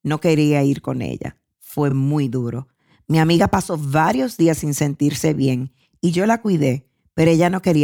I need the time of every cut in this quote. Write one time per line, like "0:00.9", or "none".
none